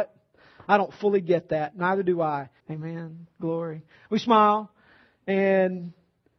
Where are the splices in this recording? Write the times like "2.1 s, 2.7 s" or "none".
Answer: 2.6 s